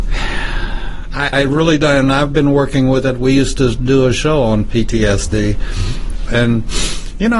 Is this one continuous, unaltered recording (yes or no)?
no